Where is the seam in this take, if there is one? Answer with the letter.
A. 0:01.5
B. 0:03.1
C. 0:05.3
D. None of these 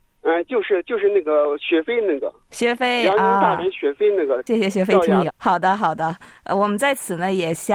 C